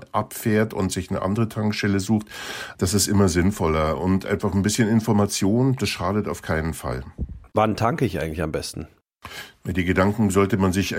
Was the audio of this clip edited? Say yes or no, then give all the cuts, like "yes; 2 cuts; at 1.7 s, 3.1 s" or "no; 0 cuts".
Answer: no; 0 cuts